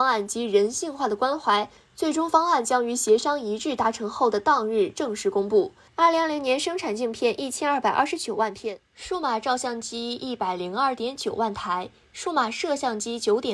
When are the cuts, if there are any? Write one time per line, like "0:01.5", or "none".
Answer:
0:05.9